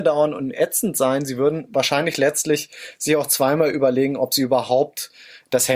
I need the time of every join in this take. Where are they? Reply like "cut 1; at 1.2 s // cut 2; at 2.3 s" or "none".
none